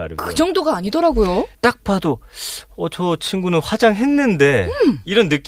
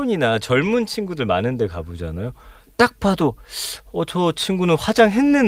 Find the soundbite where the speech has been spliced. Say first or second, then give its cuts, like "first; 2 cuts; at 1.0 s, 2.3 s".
first; 1 cut; at 1.5 s